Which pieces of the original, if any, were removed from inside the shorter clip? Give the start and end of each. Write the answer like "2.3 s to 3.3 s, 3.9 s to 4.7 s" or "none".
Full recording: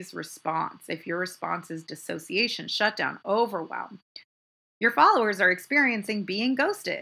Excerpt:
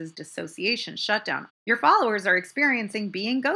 3.2 s to 4.6 s